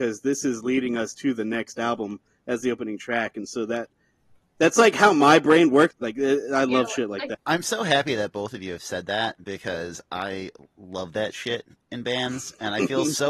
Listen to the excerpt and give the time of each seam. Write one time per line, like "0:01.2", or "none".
0:05.9
0:07.3